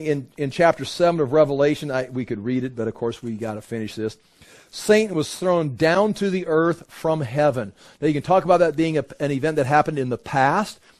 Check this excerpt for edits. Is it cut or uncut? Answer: uncut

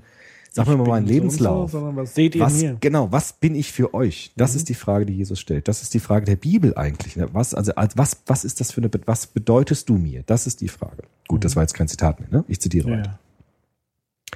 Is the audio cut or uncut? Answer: uncut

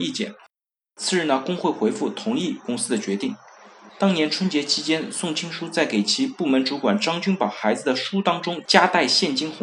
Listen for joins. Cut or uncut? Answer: cut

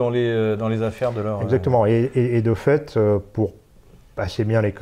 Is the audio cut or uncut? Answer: uncut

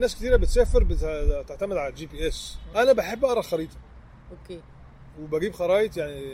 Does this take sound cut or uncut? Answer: cut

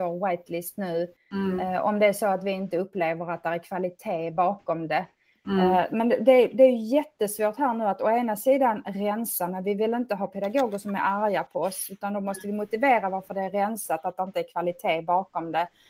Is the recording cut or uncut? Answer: uncut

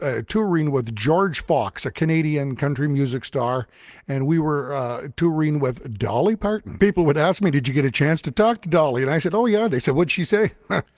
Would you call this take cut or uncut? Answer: cut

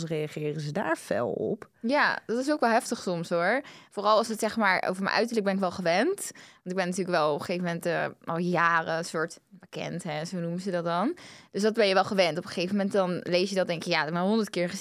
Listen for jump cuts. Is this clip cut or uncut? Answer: uncut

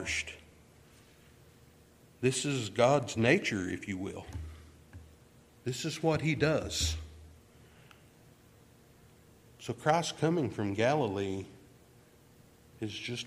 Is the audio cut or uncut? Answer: uncut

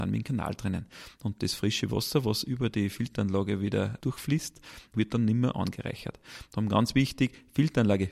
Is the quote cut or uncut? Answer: uncut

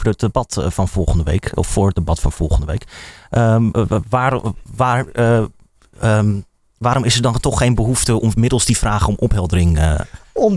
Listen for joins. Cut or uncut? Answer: uncut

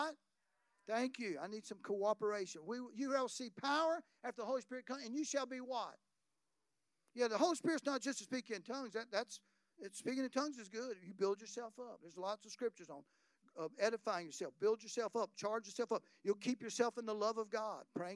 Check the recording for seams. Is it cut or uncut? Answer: uncut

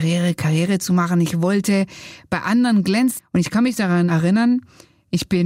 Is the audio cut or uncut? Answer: cut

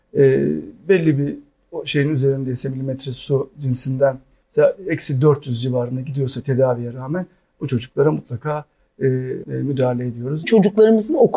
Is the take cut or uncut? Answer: cut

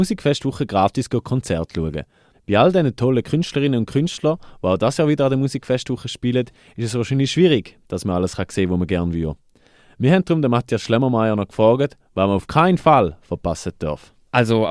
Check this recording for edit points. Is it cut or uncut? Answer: cut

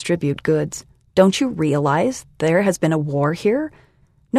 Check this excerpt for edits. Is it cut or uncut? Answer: cut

